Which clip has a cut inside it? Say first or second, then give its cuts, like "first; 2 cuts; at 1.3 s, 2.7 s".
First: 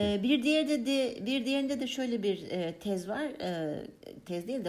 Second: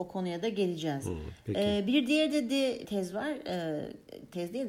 second; 1 cut; at 2.8 s